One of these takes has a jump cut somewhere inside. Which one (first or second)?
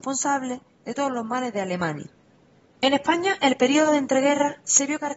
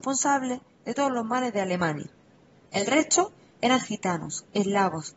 first